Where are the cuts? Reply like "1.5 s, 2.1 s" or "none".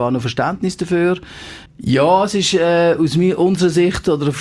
1.7 s